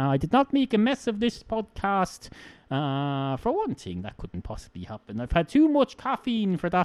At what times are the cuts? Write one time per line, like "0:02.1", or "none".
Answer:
none